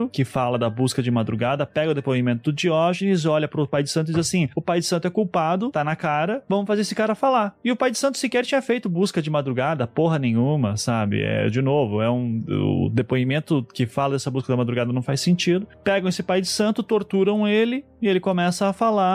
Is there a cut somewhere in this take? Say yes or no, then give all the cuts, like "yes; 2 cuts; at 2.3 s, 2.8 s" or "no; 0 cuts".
no; 0 cuts